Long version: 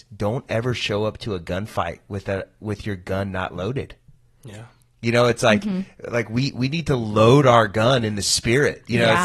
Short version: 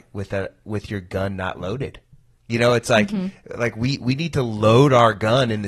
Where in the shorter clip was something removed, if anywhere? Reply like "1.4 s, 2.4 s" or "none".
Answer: 2.4 s